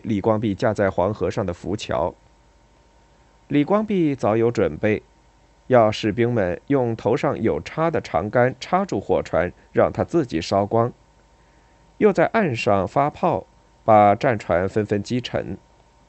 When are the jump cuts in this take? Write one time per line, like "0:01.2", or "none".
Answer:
none